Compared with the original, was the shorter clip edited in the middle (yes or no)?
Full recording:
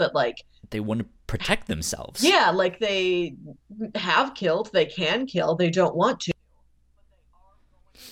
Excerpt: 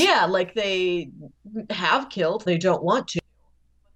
yes